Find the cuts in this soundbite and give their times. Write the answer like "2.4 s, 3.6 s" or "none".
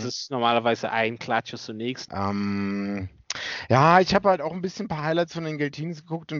2.1 s